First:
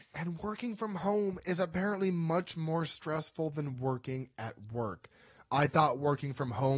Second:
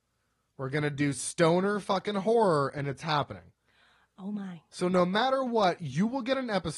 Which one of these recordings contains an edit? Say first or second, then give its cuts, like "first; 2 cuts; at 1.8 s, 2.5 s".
second; 1 cut; at 4.7 s